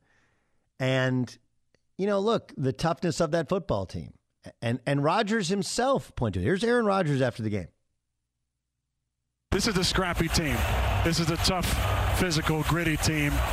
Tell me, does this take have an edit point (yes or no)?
no